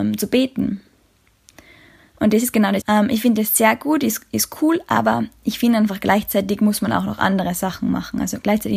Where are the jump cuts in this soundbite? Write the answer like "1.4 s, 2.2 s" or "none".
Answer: 2.8 s